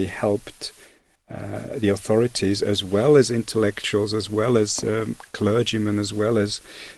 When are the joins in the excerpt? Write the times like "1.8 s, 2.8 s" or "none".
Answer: none

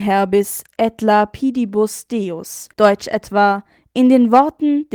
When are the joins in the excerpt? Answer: 2.7 s

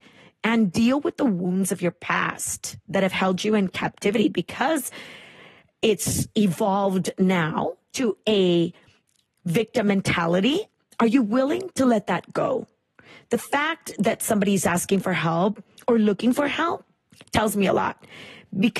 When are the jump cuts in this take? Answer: none

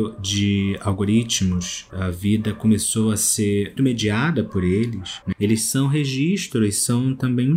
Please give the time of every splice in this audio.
3.8 s, 5.3 s

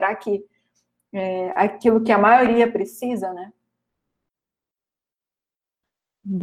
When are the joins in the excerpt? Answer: none

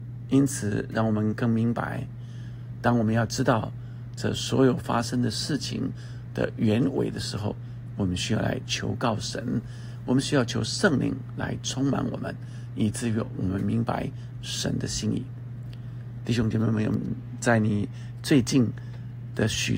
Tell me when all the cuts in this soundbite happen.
none

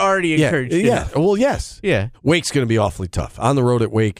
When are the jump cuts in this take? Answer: 2.1 s

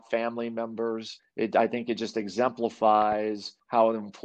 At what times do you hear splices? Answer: 1.2 s

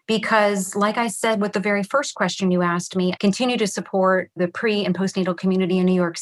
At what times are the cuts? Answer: 3.2 s

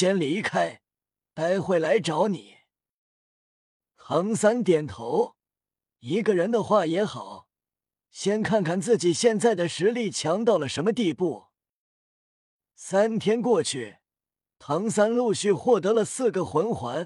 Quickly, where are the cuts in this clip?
none

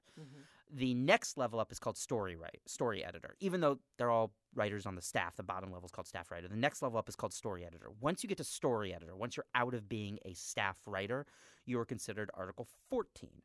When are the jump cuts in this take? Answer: none

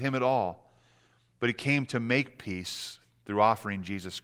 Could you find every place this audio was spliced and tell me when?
none

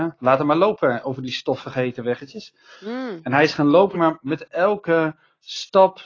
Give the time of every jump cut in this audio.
3.9 s

